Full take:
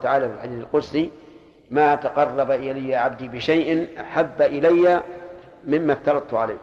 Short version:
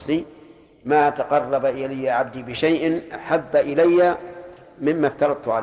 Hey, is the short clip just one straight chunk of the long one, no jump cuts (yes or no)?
yes